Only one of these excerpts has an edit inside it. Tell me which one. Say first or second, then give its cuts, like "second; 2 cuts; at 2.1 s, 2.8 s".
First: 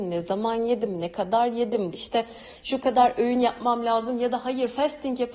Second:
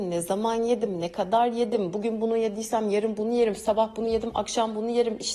first; 1 cut; at 1.9 s